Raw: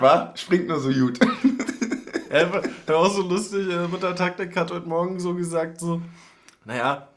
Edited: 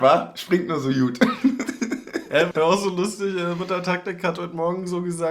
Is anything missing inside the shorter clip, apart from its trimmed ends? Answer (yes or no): yes